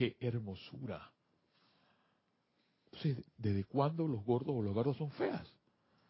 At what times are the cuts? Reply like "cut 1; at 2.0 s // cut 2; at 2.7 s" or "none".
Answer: none